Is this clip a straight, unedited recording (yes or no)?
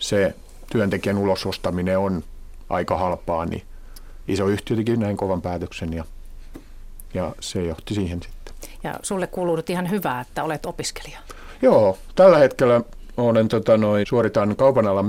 no